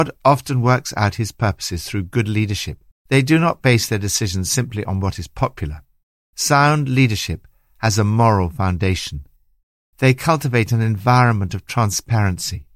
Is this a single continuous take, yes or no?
no